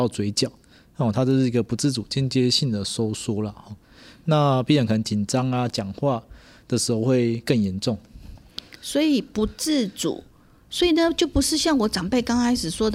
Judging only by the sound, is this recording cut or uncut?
uncut